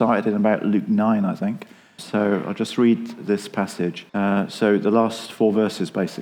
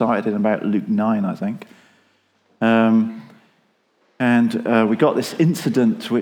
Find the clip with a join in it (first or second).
first